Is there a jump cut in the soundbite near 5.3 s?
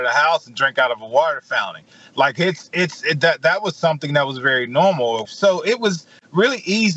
yes; 1 cut; at 5.3 s

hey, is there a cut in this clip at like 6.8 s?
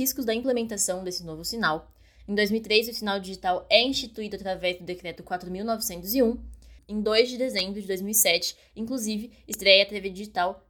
yes; 1 cut; at 6.8 s

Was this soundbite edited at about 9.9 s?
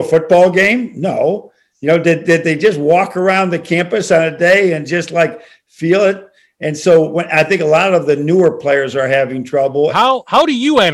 yes; 1 cut; at 9.9 s

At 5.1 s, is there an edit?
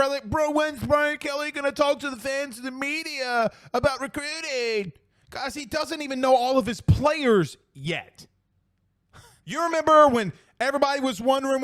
no; 1 cut; at 9.4 s

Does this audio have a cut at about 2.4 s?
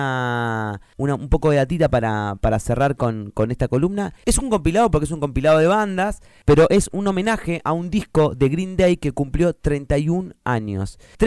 no; 1 cut; at 4.2 s

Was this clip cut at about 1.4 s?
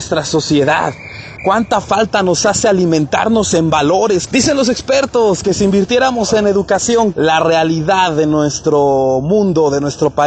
yes; 3 cuts; at 1.4 s, 4.3 s, 7.1 s

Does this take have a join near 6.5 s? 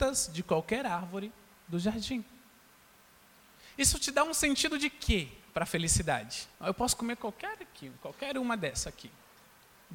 yes; 1 cut; at 6.5 s

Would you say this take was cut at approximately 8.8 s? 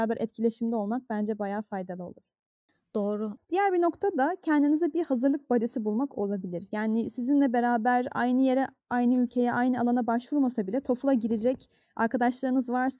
no; 1 cut; at 3.4 s

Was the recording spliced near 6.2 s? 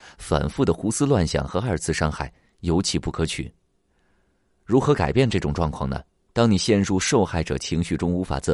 yes; 1 cut; at 6.2 s

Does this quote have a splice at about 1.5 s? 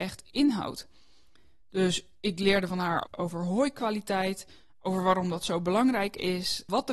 no; 1 cut; at 3.0 s

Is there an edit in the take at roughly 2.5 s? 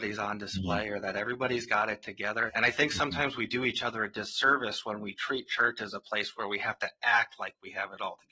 yes; 1 cut; at 2.5 s

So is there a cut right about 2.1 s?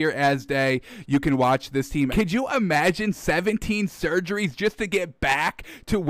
yes; 1 cut; at 2.1 s

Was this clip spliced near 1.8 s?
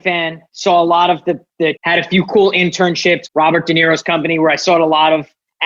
yes; 2 cuts; at 1.8 s, 3.3 s

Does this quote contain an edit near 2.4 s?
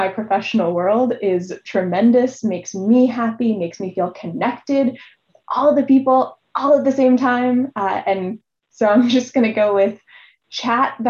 no; 0 cuts

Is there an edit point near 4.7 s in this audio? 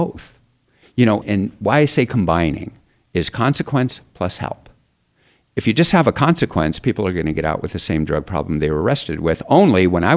no; 1 cut; at 1.2 s

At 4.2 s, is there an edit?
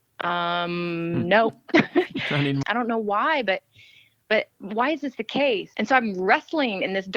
no; 2 cuts; at 2.6 s, 5.7 s

